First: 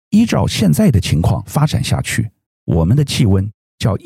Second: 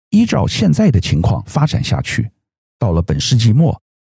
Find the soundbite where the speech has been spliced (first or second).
first